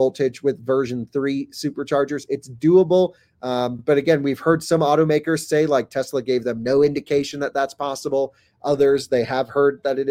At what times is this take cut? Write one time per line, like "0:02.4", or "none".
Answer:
none